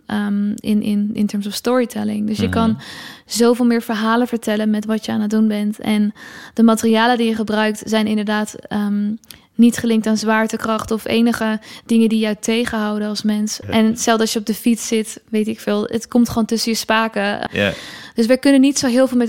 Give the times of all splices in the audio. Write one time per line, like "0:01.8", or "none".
0:13.6
0:17.5